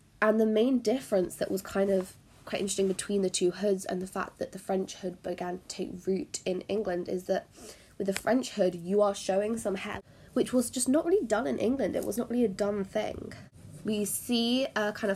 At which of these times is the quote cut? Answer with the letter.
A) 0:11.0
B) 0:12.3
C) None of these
C